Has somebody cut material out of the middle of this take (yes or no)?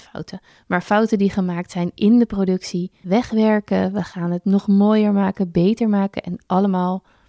yes